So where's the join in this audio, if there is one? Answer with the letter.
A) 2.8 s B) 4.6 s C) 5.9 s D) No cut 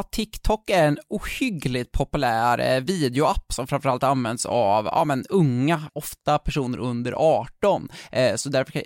C